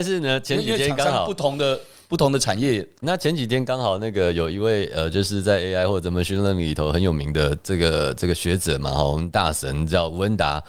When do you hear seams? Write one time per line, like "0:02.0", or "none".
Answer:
0:03.0